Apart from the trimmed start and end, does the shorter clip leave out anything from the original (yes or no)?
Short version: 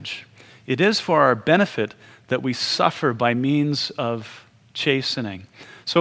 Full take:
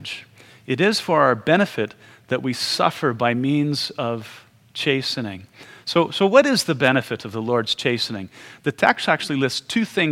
no